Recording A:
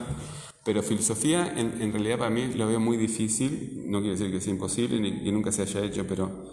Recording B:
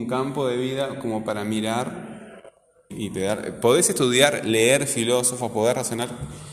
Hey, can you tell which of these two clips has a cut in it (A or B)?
B